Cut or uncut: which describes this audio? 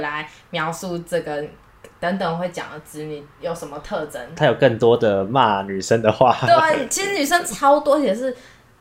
uncut